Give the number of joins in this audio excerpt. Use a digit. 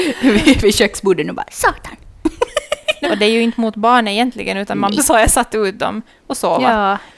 2